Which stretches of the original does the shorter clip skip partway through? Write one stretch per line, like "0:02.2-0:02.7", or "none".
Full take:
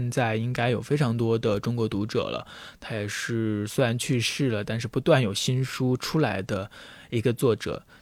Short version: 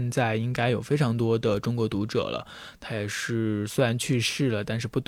none